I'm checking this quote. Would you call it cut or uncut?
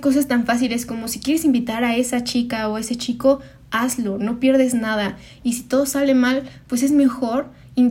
uncut